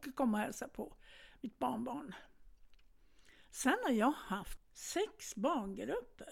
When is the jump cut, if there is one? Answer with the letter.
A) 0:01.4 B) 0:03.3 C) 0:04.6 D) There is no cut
C